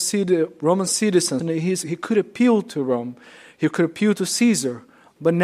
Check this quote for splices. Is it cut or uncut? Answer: cut